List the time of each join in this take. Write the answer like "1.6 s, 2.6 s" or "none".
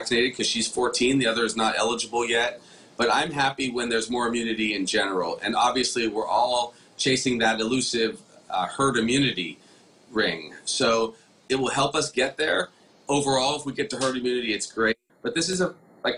15.1 s